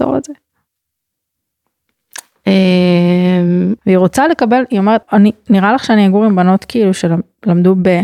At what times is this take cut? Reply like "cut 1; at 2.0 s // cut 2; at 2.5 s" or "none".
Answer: cut 1; at 3.8 s // cut 2; at 5.0 s